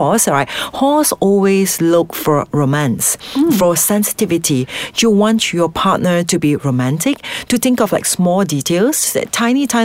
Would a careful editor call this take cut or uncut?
uncut